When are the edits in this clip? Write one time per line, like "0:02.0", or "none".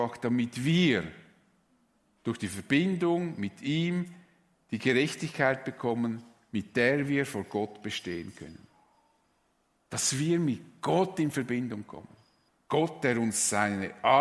0:12.5